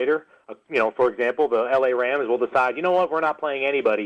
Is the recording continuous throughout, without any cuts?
yes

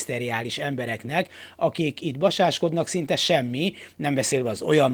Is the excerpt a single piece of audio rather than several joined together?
yes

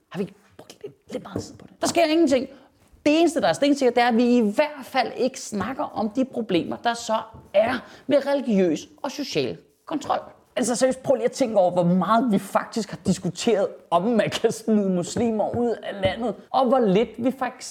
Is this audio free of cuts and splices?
no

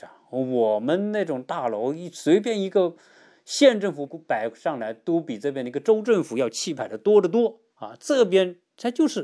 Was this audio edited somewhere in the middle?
yes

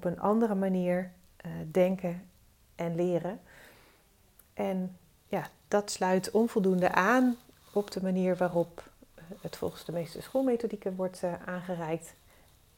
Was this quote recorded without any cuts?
yes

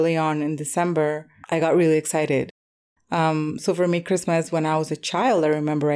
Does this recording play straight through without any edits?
no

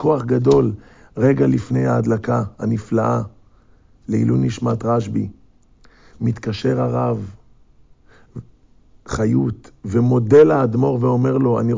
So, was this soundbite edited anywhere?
no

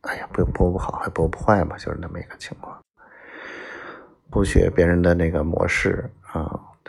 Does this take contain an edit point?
yes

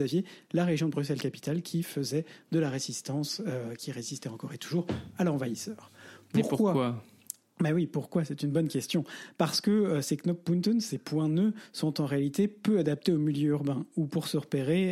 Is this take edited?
no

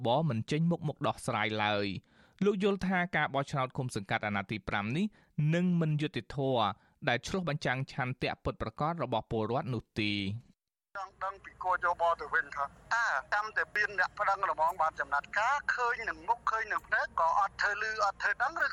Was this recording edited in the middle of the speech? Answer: no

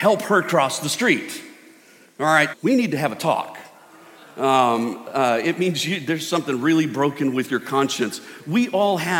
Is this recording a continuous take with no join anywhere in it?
no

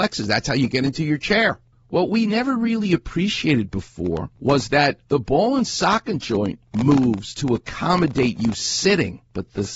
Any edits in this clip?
no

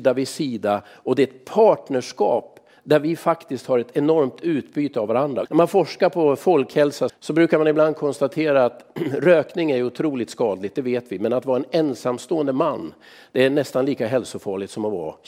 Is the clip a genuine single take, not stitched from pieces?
no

